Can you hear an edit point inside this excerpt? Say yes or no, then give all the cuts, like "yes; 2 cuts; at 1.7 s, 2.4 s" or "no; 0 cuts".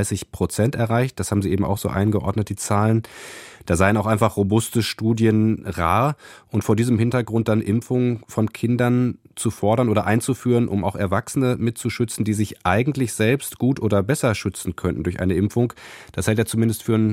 no; 0 cuts